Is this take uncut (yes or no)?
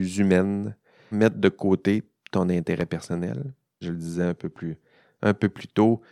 no